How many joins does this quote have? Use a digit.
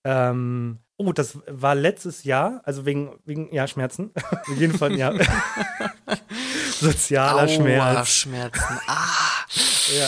1